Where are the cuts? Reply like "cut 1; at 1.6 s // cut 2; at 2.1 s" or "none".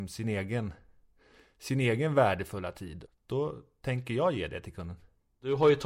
cut 1; at 3.1 s